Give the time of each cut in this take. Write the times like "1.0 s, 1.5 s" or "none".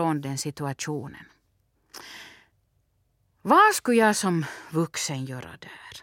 none